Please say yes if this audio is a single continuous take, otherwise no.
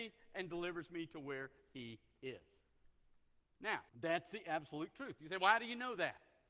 no